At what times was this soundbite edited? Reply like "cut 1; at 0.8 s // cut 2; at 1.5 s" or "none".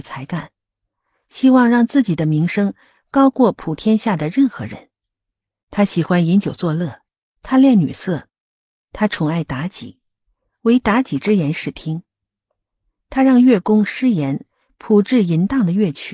cut 1; at 5.6 s